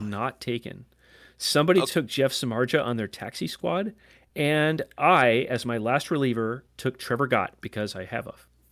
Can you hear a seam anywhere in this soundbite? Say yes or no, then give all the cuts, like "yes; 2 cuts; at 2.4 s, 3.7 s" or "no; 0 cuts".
no; 0 cuts